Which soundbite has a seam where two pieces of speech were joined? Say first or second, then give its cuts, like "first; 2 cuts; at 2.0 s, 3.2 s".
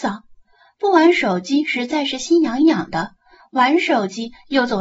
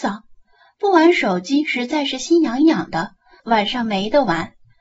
second; 1 cut; at 3.4 s